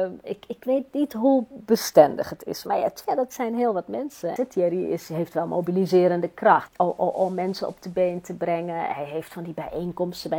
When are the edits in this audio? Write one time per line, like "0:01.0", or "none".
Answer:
0:03.0
0:04.4
0:06.7